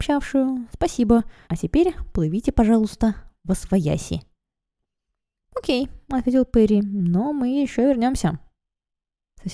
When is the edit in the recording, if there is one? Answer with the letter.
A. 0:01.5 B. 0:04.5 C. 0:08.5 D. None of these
A